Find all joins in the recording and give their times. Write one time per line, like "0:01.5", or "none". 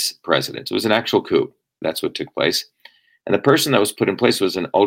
0:01.8